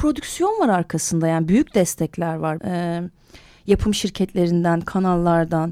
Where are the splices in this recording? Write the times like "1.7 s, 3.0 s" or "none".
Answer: 2.6 s